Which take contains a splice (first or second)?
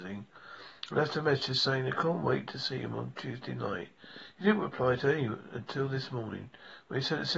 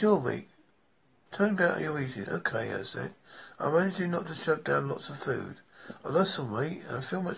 second